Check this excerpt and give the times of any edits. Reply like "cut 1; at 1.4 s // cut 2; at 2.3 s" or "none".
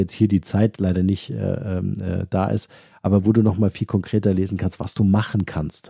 none